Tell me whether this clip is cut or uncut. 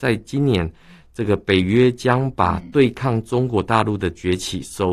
uncut